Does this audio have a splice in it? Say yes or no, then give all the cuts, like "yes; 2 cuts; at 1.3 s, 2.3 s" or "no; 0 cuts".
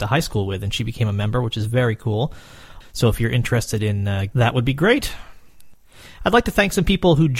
yes; 2 cuts; at 2.8 s, 4.3 s